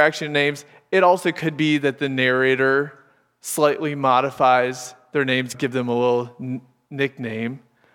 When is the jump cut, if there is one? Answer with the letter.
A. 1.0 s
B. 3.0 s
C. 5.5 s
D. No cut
C